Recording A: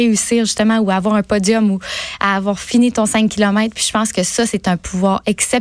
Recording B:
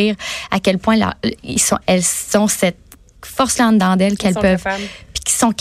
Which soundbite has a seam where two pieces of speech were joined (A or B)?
B